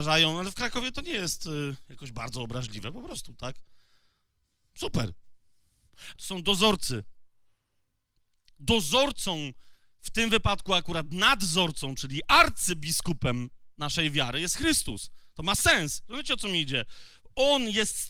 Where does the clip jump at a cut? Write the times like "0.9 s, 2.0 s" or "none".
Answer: 6.2 s